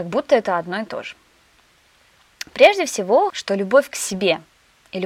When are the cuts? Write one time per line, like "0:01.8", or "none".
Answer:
0:03.3